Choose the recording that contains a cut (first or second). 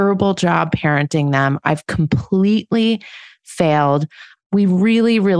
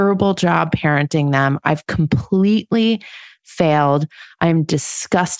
first